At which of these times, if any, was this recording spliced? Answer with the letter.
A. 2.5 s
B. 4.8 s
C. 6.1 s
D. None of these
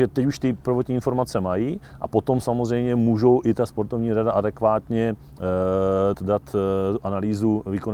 C